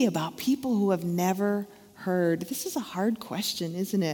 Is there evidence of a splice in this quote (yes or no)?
no